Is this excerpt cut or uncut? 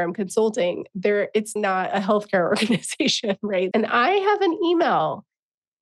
cut